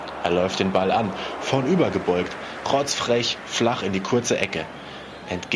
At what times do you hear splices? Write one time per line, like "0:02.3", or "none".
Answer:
0:02.6